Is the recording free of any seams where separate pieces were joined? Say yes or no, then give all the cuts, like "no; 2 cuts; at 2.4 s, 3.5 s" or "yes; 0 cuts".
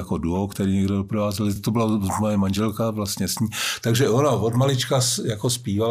yes; 0 cuts